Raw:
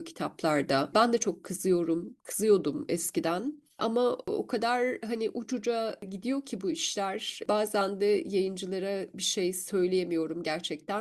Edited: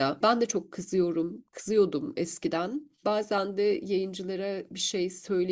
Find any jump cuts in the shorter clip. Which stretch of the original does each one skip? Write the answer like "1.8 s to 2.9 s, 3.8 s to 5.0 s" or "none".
3.7 s to 7.5 s